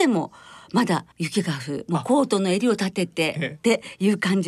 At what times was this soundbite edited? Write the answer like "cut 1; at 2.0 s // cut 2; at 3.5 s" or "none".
cut 1; at 1.1 s